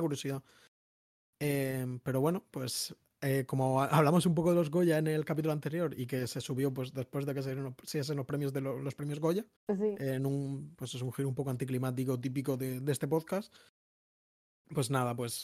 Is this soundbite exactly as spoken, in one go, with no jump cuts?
no; 1 cut; at 9.5 s

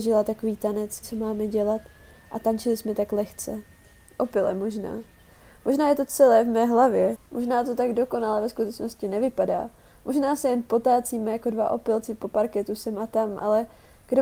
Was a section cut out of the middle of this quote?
yes; 1 cut; at 1.0 s

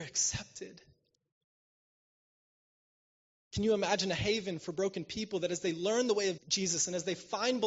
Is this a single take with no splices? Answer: no; 1 cut; at 6.4 s

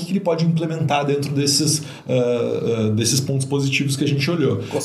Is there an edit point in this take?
no; 0 cuts

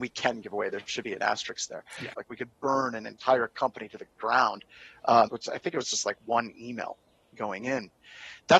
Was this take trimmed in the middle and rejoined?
yes; 2 cuts; at 2.1 s, 5.3 s

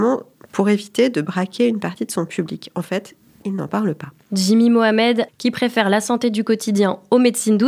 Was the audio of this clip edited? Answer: yes; 2 cuts; at 3.4 s, 5.3 s

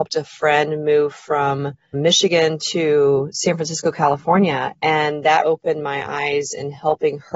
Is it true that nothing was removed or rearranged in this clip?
no; 2 cuts; at 1.9 s, 5.4 s

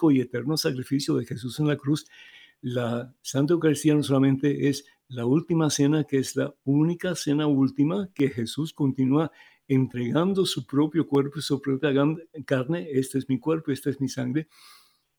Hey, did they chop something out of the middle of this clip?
no; 0 cuts

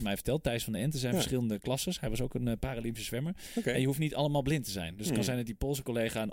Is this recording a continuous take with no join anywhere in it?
yes; 0 cuts

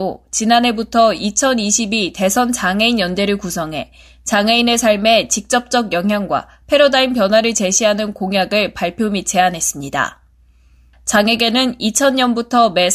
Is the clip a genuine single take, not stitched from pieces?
no; 1 cut; at 10.9 s

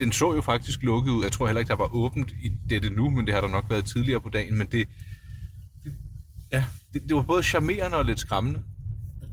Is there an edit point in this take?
no; 0 cuts

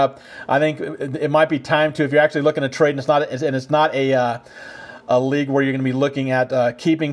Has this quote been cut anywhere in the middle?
no; 0 cuts

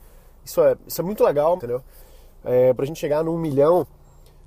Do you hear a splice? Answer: yes; 2 cuts; at 1.6 s, 2.8 s

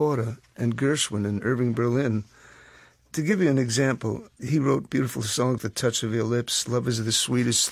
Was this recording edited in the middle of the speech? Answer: yes; 1 cut; at 5.6 s

